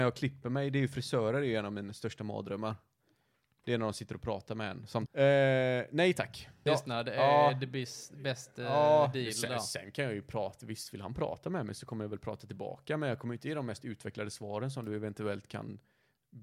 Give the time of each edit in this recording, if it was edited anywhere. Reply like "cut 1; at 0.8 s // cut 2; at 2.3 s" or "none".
cut 1; at 5.1 s // cut 2; at 6.7 s